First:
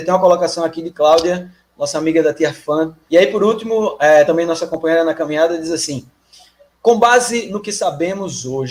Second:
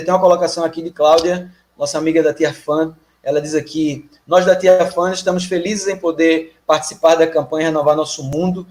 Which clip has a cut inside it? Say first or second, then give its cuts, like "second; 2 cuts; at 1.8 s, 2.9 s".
first; 2 cuts; at 3.1 s, 4.3 s